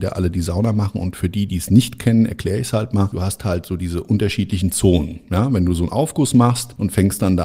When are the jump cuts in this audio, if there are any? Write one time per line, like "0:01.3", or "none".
none

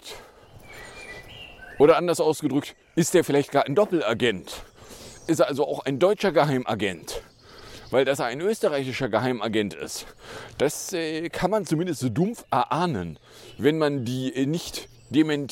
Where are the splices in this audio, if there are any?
none

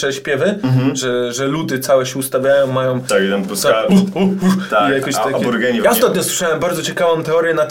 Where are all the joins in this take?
0:05.8

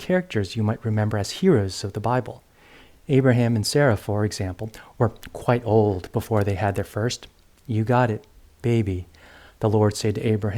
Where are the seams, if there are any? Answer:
none

